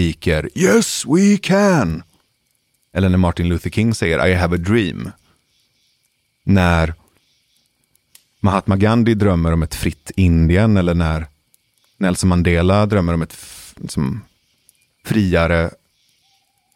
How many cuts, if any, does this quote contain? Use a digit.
0